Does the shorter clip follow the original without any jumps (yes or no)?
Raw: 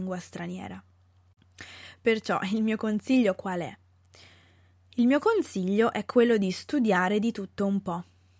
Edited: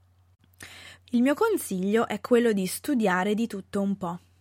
no